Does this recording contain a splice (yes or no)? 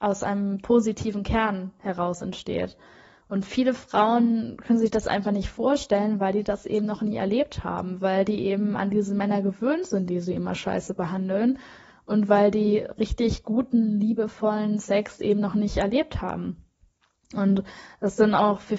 no